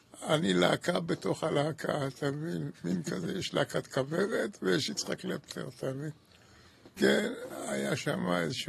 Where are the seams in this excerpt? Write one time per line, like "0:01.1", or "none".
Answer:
0:07.0